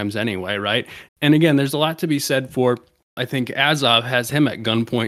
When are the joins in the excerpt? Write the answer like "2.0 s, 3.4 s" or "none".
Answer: 1.1 s, 3.2 s